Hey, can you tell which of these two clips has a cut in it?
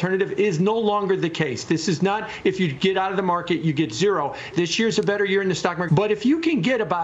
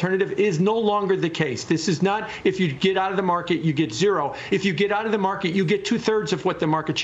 first; 2 cuts; at 4.5 s, 5.9 s

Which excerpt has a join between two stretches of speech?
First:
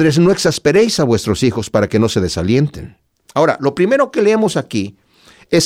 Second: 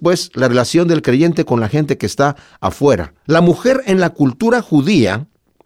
second; 1 cut; at 3.2 s

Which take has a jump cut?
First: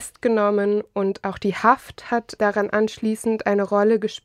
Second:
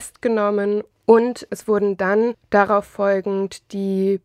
second; 1 cut; at 0.9 s

